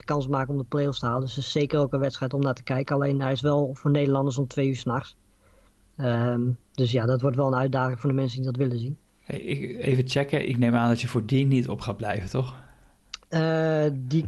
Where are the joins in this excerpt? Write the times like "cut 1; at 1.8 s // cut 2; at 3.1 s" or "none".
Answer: none